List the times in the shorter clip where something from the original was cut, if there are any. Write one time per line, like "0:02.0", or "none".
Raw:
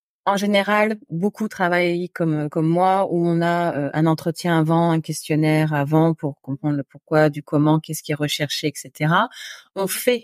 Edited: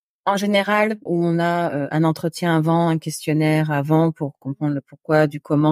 0:01.1